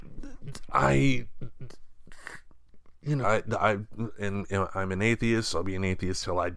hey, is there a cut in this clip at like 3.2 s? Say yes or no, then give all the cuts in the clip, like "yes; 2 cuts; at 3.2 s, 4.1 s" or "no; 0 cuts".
yes; 1 cut; at 3.2 s